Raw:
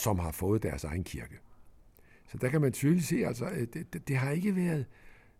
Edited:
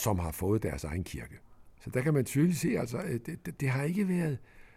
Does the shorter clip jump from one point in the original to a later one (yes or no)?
yes